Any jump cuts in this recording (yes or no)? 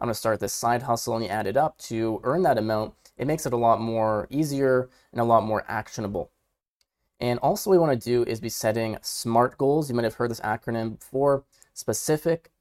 yes